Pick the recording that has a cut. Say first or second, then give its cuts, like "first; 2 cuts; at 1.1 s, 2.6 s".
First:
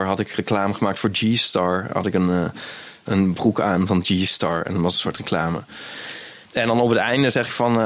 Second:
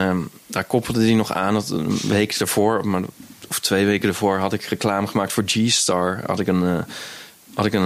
first; 2 cuts; at 3.0 s, 6.4 s